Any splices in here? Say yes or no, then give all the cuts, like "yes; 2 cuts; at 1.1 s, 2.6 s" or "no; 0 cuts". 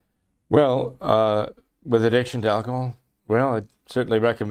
yes; 1 cut; at 3.2 s